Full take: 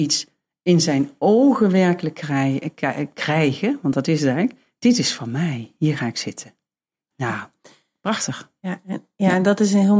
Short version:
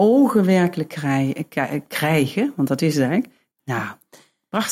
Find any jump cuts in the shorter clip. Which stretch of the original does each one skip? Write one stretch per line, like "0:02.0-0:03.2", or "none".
0:04.8-0:07.0